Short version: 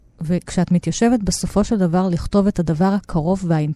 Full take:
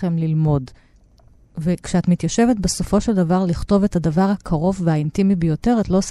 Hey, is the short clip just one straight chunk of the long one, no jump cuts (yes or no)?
yes